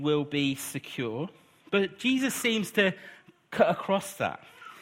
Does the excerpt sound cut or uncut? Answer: uncut